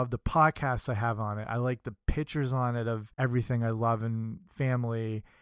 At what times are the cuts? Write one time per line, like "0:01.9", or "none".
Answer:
0:01.5
0:03.1